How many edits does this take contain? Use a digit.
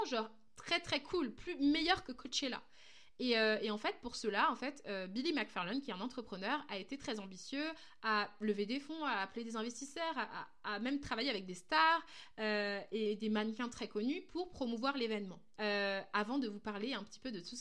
1